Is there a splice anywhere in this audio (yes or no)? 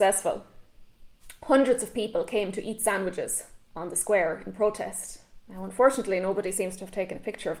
no